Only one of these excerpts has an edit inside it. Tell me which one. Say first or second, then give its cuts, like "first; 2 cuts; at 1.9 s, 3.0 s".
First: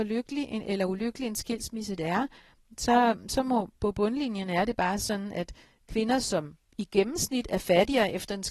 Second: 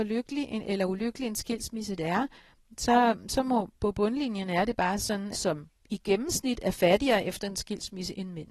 second; 1 cut; at 5.3 s